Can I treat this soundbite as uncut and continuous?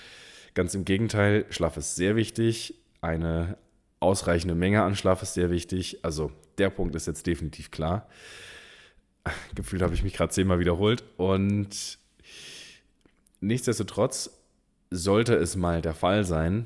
yes; 0 cuts

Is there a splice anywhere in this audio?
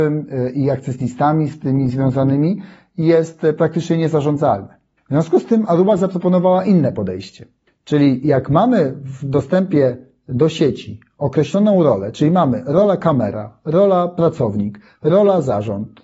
no; 0 cuts

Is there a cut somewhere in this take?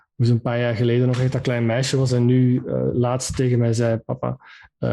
no; 0 cuts

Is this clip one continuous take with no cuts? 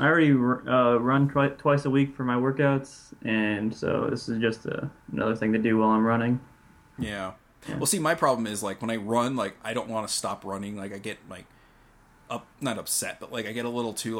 yes; 0 cuts

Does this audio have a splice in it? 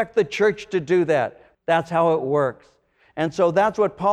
yes; 1 cut; at 1.5 s

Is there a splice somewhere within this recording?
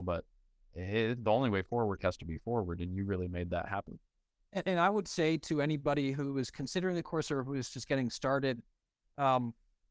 no; 0 cuts

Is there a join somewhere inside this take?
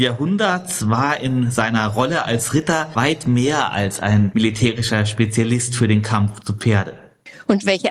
no; 0 cuts

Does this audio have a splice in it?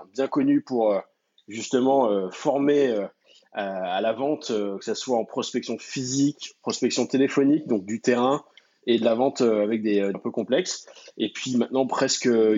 yes; 1 cut; at 10.1 s

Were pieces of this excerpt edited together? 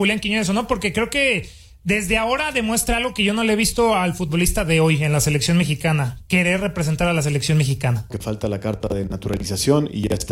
yes; 1 cut; at 8.1 s

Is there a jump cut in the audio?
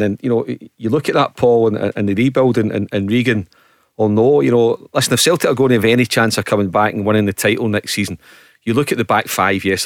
no; 0 cuts

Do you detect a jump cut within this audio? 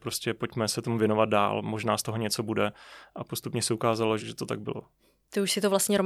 yes; 1 cut; at 4.2 s

